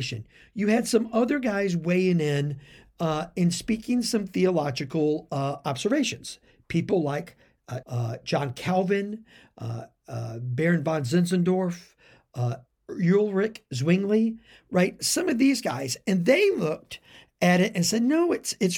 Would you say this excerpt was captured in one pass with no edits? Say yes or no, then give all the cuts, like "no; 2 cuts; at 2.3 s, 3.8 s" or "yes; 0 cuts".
no; 1 cut; at 7.8 s